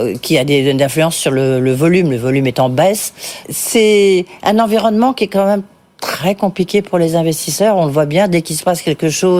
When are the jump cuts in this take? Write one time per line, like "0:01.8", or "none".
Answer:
0:03.4